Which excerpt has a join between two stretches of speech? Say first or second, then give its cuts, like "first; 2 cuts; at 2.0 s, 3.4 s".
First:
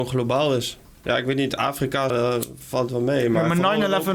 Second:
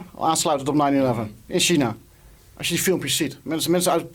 first; 1 cut; at 2.1 s